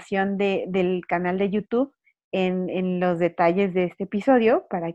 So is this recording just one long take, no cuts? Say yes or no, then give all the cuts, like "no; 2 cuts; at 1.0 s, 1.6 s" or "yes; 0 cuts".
yes; 0 cuts